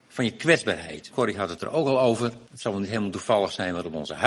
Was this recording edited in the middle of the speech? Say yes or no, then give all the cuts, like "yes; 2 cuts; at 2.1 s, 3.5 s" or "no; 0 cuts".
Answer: yes; 2 cuts; at 1.1 s, 2.5 s